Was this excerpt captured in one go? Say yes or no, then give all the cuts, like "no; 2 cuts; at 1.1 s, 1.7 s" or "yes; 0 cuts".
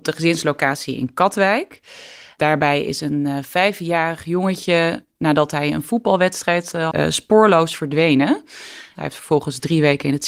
no; 2 cuts; at 6.9 s, 8.9 s